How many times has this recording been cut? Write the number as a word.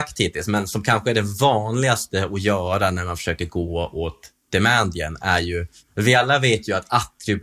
zero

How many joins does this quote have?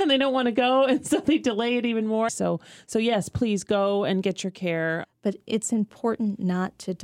two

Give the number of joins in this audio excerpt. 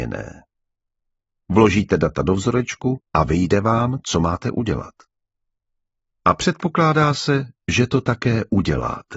one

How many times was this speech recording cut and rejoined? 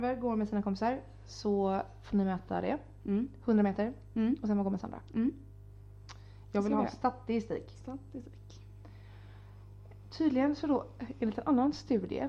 zero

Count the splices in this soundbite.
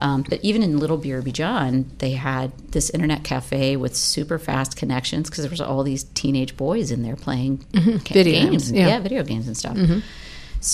zero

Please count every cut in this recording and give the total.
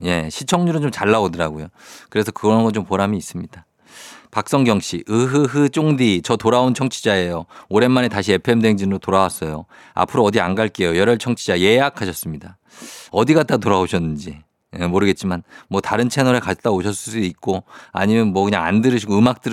one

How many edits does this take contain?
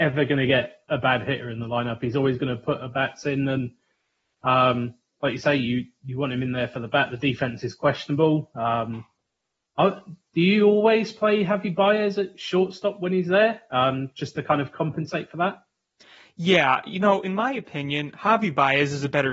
zero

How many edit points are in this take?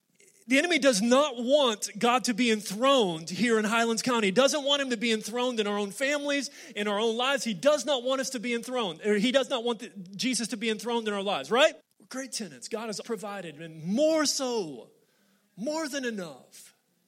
two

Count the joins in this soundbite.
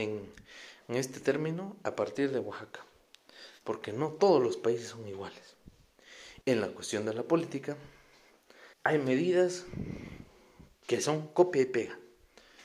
three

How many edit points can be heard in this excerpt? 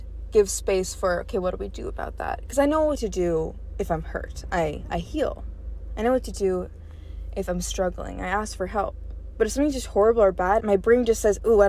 one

